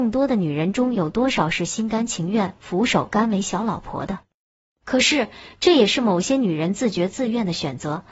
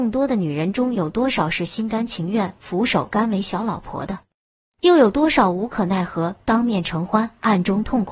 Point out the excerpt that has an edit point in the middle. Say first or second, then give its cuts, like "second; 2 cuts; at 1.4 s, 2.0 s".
first; 1 cut; at 4.7 s